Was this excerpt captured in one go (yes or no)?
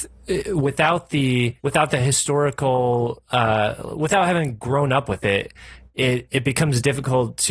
no